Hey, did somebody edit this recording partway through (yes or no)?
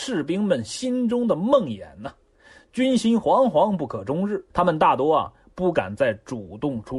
yes